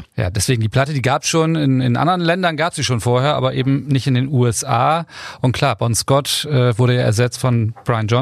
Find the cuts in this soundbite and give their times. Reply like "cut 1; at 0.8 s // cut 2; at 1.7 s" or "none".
none